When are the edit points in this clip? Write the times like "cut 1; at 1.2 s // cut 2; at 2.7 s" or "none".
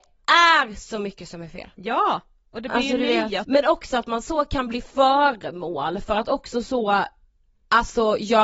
cut 1; at 3.4 s